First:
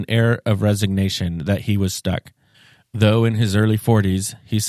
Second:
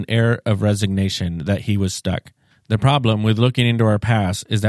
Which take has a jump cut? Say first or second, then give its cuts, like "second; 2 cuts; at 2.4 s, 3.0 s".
second; 1 cut; at 2.5 s